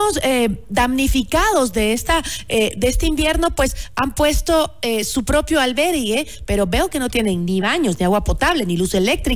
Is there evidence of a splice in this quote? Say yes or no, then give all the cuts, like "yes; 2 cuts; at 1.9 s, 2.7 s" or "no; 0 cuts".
no; 0 cuts